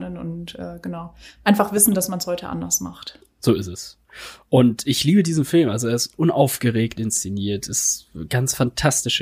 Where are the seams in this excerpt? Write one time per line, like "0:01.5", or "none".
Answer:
none